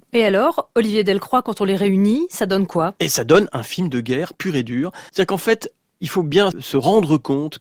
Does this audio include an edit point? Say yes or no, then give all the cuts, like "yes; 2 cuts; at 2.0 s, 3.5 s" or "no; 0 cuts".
yes; 2 cuts; at 5.1 s, 6.5 s